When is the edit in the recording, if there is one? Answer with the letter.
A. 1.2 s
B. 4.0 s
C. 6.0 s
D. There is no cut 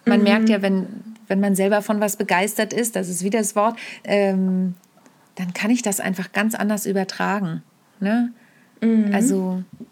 B